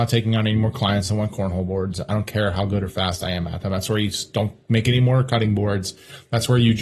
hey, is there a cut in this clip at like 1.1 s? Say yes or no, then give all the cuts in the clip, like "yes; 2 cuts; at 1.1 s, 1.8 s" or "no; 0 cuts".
no; 0 cuts